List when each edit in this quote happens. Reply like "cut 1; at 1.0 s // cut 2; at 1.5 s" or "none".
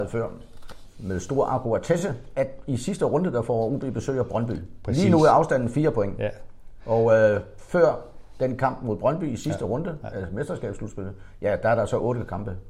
none